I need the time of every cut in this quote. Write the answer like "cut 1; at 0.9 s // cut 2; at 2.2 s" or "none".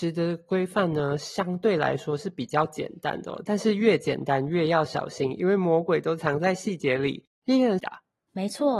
cut 1; at 7.8 s